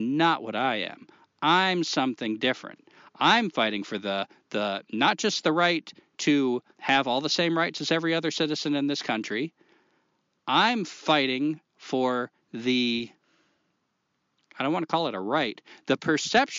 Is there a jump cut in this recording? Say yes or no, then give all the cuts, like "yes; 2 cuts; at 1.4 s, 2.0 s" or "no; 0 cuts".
yes; 1 cut; at 6.7 s